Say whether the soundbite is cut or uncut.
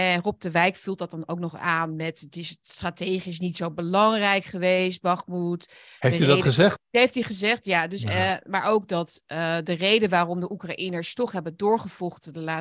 uncut